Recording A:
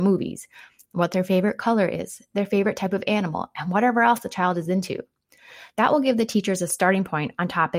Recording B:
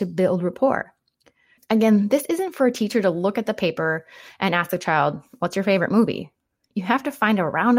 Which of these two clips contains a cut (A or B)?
B